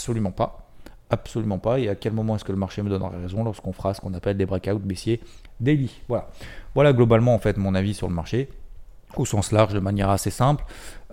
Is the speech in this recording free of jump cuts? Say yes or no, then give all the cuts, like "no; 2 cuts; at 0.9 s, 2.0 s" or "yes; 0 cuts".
yes; 0 cuts